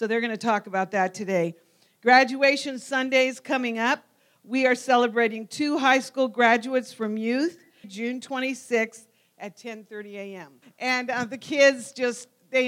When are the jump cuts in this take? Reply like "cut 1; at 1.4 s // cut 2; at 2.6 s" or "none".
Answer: cut 1; at 7.8 s // cut 2; at 10.6 s